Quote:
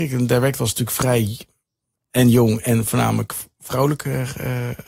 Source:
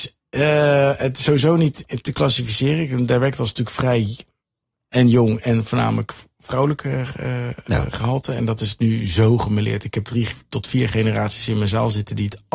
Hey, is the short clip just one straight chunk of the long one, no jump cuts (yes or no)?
yes